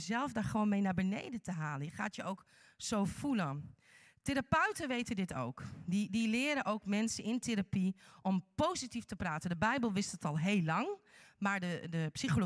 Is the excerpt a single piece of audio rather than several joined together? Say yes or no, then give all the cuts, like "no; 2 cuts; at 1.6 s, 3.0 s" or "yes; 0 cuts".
yes; 0 cuts